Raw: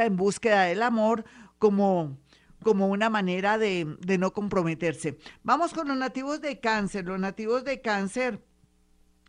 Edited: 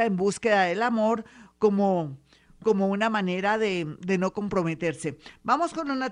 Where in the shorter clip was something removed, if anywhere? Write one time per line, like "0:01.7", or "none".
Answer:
none